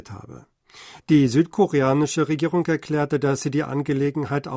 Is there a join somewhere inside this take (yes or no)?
yes